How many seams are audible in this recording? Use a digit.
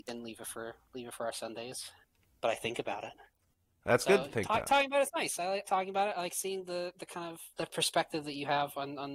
2